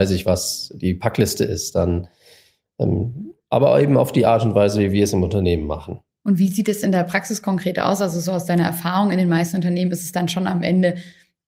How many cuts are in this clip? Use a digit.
1